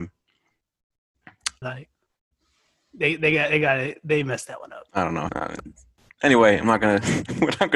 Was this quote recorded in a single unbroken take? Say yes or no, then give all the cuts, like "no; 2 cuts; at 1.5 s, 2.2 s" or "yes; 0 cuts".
no; 2 cuts; at 1.6 s, 5.3 s